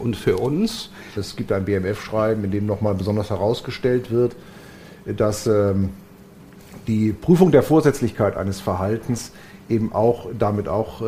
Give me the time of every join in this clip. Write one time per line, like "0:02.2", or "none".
0:01.2